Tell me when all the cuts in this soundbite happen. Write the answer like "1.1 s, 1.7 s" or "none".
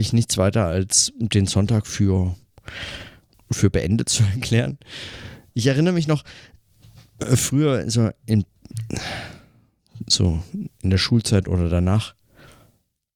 3.3 s